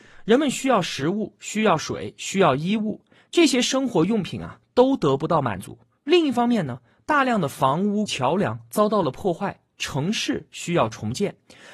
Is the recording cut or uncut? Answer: cut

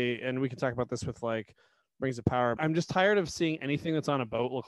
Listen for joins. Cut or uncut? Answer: cut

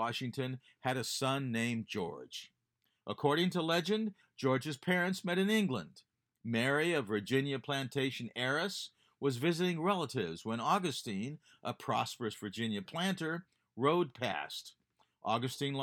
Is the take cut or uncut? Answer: uncut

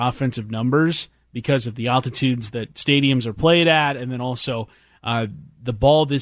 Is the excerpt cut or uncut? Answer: uncut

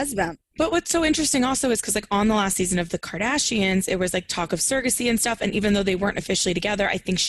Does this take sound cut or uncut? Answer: uncut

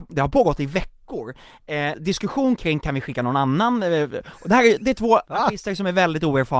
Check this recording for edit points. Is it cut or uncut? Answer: cut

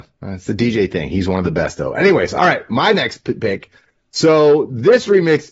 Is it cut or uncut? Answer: uncut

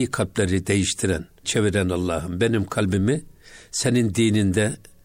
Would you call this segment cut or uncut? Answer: cut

